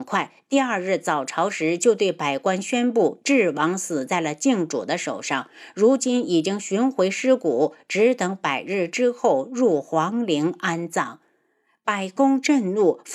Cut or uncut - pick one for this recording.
uncut